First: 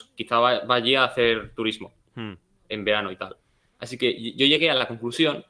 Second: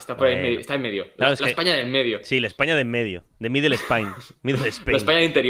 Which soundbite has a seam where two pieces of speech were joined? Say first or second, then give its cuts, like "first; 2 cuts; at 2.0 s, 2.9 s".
second; 1 cut; at 3.3 s